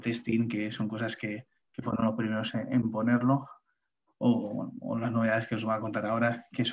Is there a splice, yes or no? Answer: no